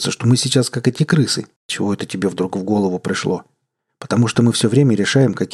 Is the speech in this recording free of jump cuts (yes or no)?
no